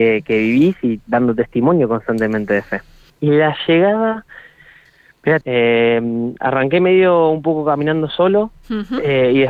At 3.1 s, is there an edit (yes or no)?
yes